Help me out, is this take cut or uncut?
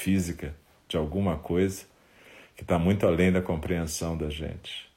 uncut